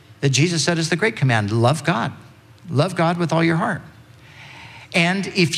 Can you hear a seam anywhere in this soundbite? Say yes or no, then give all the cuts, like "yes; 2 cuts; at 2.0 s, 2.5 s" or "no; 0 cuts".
no; 0 cuts